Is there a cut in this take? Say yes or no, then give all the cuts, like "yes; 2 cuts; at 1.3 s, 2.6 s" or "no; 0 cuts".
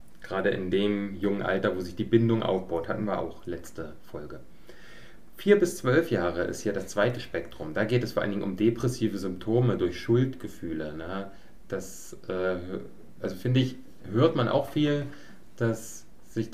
no; 0 cuts